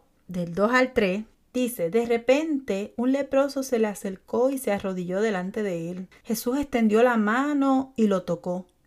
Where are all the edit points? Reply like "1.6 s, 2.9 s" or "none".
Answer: 6.2 s